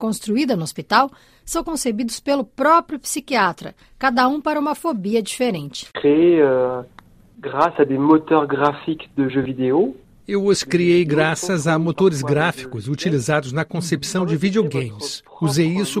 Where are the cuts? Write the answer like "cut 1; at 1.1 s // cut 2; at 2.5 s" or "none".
none